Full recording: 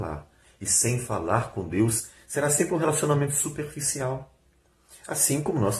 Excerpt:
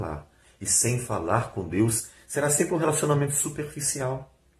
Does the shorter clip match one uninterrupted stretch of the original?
yes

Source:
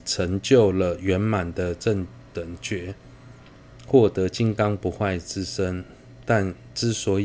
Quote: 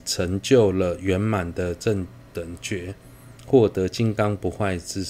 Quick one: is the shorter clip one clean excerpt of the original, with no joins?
no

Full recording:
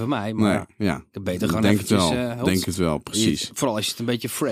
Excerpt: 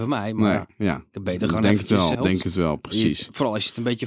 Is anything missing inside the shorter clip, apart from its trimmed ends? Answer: yes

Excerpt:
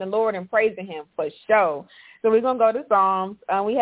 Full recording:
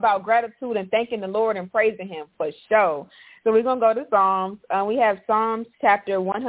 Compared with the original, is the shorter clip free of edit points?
yes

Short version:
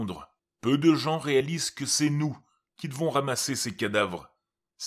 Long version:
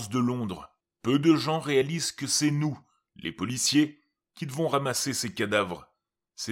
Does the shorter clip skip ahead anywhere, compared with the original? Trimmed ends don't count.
yes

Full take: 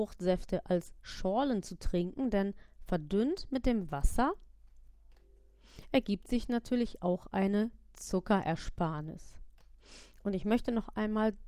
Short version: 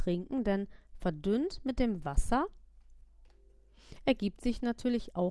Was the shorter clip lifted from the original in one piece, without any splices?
yes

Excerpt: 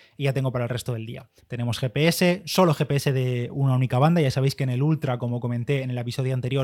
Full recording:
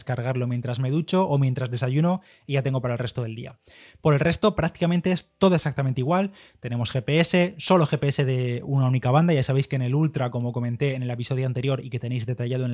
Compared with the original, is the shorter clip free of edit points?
no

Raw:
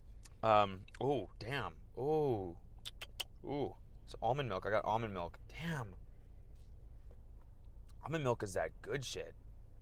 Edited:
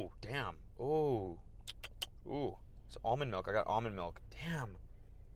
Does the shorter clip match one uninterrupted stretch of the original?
yes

